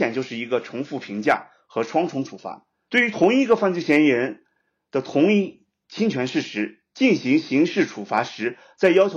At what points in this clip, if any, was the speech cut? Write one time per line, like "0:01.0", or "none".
0:02.9

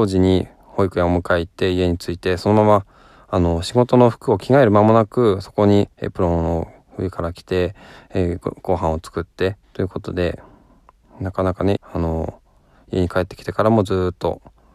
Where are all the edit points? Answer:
0:09.6
0:11.8

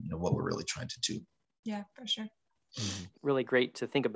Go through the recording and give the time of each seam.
0:03.2

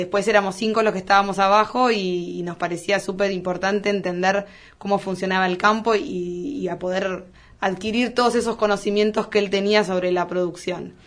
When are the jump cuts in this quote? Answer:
none

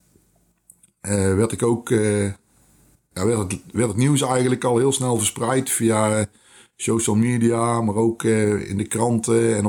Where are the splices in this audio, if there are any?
none

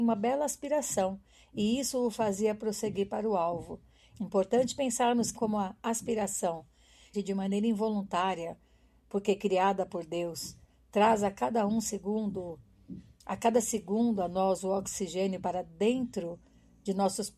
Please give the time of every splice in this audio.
0:04.1
0:05.3
0:07.1

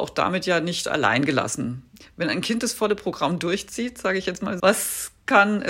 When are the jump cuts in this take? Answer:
0:04.6

